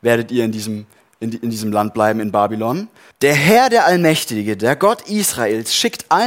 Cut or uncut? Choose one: cut